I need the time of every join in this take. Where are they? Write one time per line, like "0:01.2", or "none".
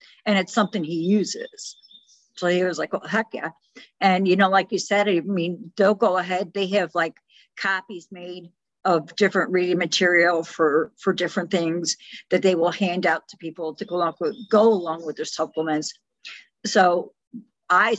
0:14.5